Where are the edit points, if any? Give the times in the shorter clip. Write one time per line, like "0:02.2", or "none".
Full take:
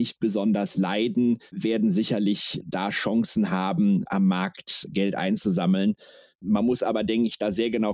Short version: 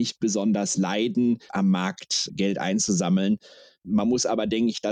0:01.5